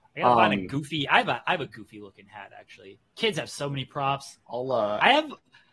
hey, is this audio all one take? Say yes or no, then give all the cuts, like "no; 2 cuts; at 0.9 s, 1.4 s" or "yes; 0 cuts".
no; 1 cut; at 4.4 s